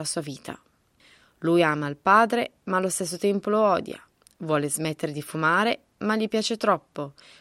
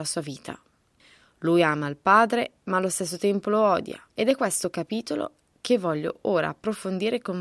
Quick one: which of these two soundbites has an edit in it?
second; 1 cut; at 4.1 s

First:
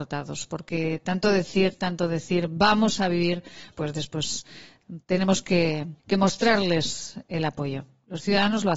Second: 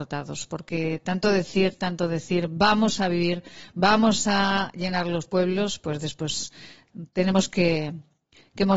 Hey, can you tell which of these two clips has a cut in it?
first; 2 cuts; at 3.7 s, 6.0 s

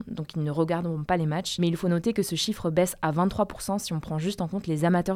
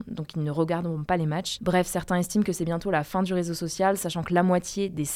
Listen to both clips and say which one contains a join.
second; 1 cut; at 1.6 s

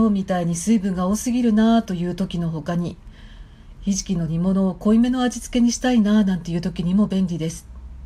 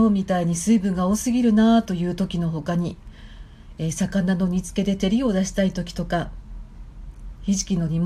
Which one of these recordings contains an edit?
first; 1 cut; at 3.7 s

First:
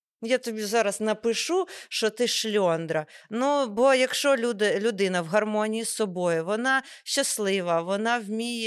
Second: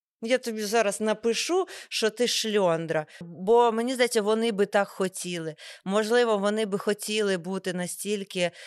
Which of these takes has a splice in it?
second; 1 cut; at 3.2 s

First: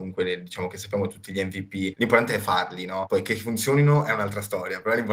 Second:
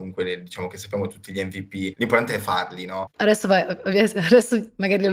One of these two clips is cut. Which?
second; 1 cut; at 3.1 s

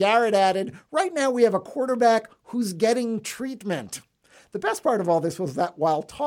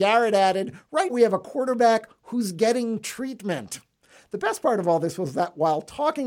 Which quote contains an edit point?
second; 1 cut; at 1.1 s

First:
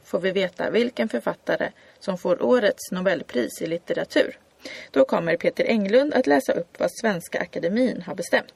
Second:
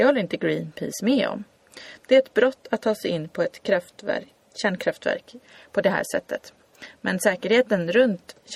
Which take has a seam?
second; 1 cut; at 2.0 s

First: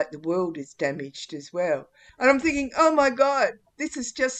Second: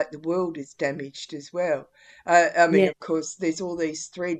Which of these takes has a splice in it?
first; 1 cut; at 2.1 s

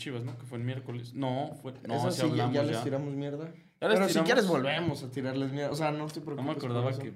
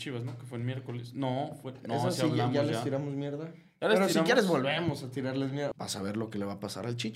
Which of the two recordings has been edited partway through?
second; 1 cut; at 5.7 s

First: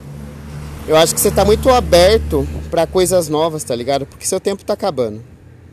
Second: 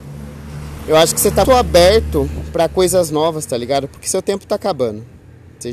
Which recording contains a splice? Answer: second; 1 cut; at 1.4 s

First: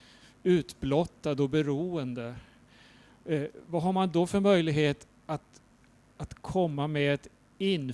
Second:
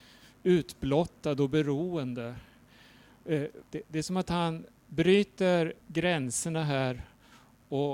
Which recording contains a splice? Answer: second; 2 cuts; at 3.6 s, 5.8 s

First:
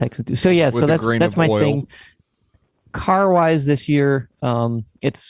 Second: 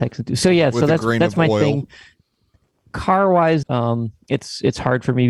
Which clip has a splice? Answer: second; 1 cut; at 3.6 s

